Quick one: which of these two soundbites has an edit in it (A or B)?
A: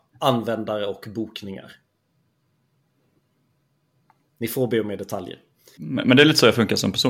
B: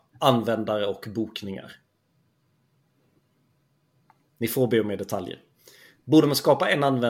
A